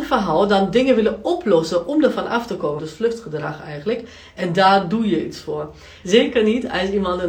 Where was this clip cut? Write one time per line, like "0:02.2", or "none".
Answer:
0:02.8
0:06.0